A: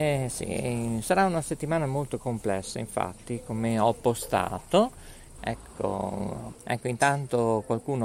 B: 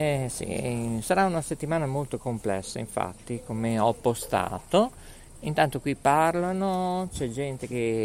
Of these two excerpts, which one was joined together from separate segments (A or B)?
A